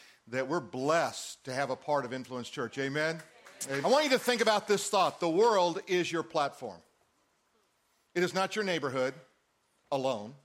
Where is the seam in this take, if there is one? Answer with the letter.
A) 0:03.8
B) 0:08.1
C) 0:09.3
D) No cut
A